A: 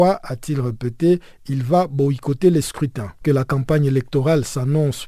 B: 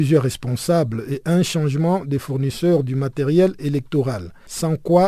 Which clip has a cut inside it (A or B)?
A